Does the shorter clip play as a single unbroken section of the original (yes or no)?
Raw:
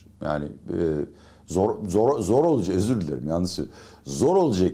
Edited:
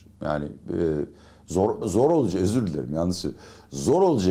no